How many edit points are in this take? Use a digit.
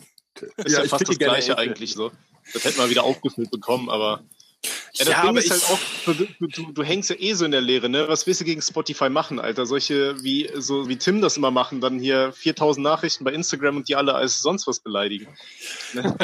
2